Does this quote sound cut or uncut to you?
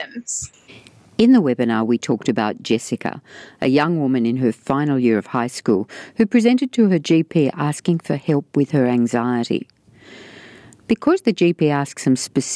uncut